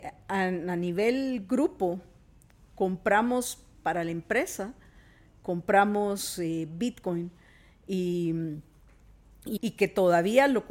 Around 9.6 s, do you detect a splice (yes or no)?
yes